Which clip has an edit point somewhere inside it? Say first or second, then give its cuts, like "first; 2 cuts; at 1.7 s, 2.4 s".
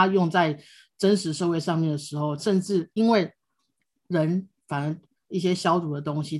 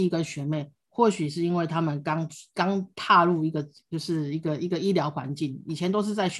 first; 2 cuts; at 2.4 s, 5.2 s